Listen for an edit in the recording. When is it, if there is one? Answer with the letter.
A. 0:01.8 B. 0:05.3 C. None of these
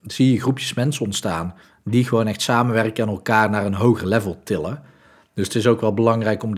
C